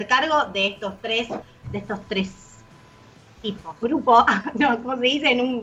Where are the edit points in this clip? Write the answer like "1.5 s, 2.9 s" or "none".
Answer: 1.6 s, 3.8 s